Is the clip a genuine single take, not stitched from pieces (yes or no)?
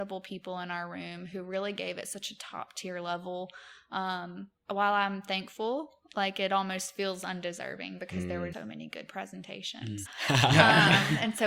no